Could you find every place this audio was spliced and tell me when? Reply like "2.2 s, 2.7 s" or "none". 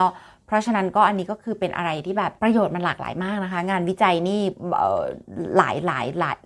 2.4 s